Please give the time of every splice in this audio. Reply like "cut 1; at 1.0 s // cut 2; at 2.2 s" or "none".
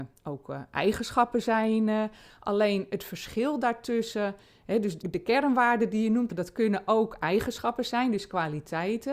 cut 1; at 5.0 s // cut 2; at 6.3 s